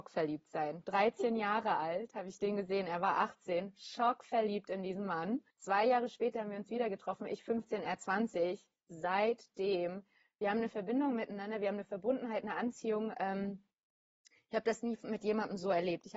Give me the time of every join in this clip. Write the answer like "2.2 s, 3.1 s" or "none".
5.5 s